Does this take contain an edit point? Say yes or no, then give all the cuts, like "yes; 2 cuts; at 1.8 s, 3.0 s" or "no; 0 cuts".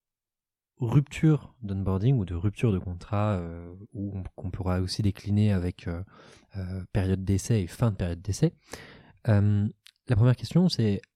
no; 0 cuts